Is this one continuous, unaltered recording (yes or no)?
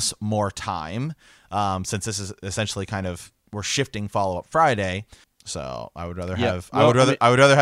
no